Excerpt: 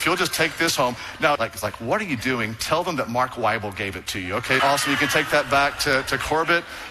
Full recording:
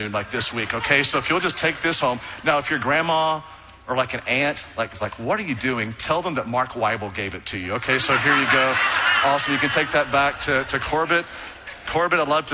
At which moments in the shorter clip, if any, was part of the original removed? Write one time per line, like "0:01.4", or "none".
0:01.4
0:04.6